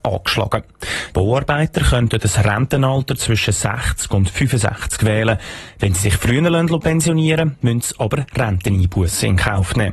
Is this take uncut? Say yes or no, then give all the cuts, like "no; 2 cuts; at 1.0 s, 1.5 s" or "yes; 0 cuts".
no; 1 cut; at 1.1 s